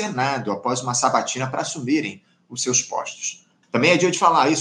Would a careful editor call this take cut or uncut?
cut